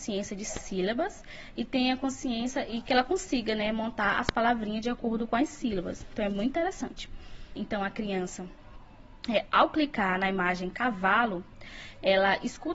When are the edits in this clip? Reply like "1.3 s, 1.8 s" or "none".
7.6 s